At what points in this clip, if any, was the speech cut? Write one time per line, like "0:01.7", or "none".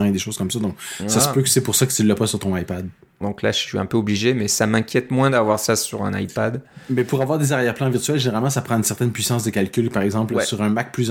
0:03.2